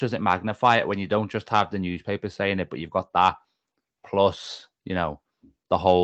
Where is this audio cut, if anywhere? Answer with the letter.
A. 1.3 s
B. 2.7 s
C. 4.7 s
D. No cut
D